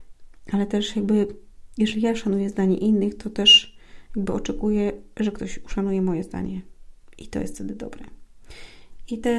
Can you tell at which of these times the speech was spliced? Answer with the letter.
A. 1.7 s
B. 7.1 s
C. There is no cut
C